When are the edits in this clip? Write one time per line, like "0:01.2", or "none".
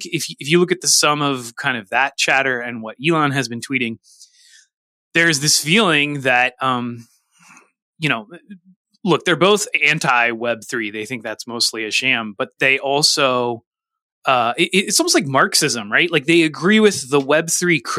none